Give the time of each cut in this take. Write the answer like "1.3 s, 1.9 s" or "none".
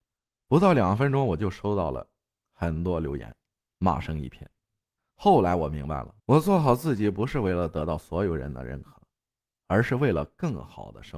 5.0 s, 6.2 s